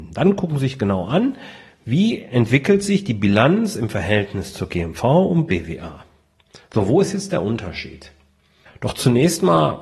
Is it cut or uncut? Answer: uncut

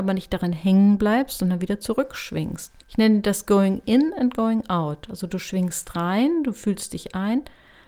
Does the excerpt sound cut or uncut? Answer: cut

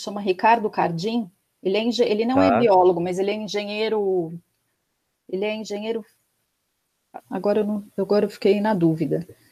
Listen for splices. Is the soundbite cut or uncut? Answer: cut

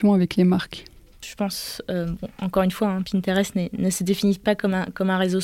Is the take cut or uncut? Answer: uncut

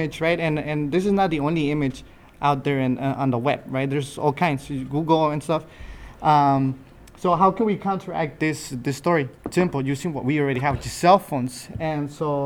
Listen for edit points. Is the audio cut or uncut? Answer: cut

